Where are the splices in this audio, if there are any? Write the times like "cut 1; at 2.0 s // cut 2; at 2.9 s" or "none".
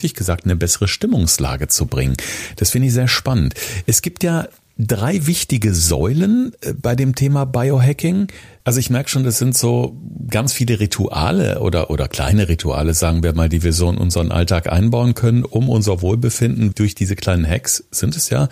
cut 1; at 8.6 s // cut 2; at 16.7 s

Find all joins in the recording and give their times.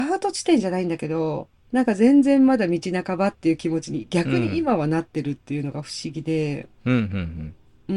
cut 1; at 1.6 s

